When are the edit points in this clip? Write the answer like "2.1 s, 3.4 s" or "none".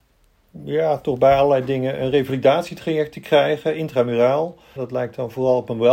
4.8 s